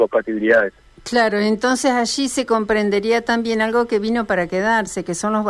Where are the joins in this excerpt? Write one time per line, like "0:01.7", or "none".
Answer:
none